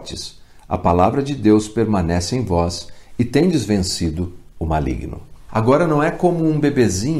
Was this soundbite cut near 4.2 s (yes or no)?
no